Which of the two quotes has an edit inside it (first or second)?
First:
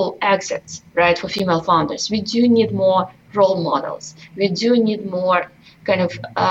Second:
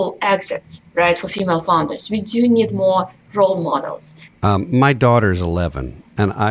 second